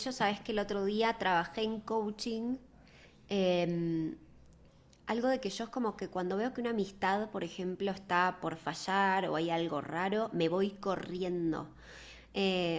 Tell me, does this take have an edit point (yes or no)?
no